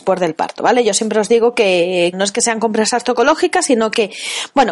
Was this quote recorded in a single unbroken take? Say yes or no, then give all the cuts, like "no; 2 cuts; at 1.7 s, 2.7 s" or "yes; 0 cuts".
no; 1 cut; at 2.1 s